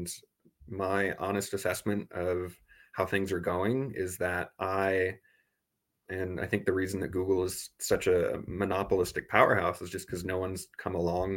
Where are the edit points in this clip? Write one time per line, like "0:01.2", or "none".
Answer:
0:06.1